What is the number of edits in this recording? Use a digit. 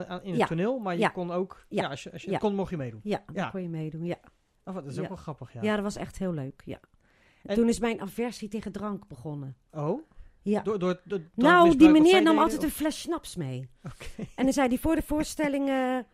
0